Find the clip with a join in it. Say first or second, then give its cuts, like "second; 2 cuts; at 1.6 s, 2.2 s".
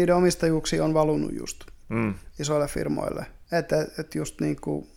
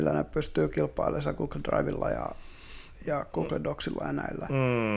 first; 1 cut; at 3.4 s